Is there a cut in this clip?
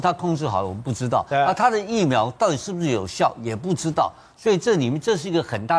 no; 0 cuts

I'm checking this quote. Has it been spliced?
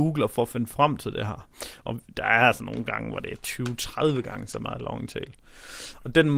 yes; 1 cut; at 1.8 s

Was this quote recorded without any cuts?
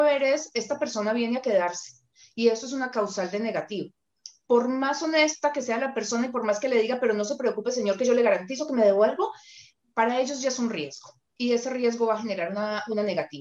yes; 0 cuts

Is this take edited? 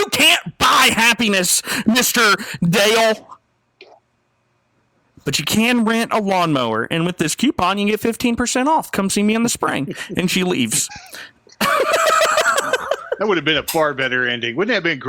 no; 0 cuts

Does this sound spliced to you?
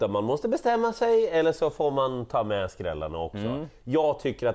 no; 0 cuts

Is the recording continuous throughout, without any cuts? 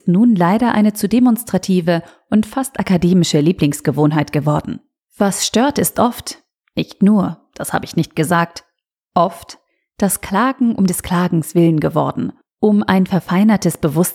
yes; 0 cuts

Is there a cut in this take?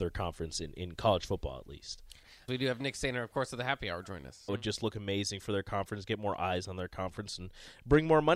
yes; 1 cut; at 4.5 s

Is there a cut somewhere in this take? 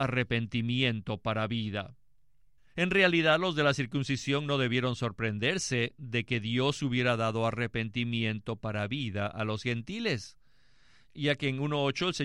yes; 1 cut; at 2.6 s

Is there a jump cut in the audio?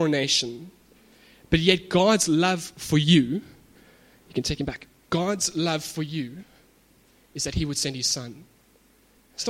yes; 1 cut; at 5.1 s

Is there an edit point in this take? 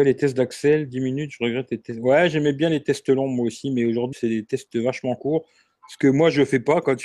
yes; 1 cut; at 4.1 s

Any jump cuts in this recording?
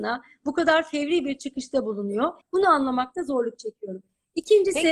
yes; 1 cut; at 2.4 s

